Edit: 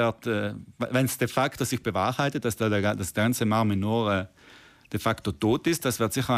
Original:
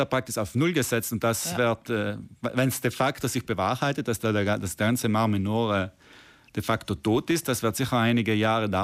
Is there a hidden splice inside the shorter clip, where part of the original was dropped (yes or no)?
no